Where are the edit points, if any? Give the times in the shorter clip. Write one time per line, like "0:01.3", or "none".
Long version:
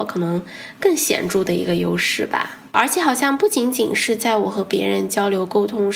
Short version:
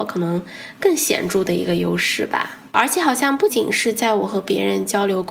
0:03.5